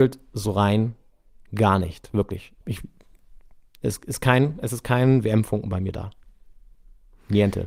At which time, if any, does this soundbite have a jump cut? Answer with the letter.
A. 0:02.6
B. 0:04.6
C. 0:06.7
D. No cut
A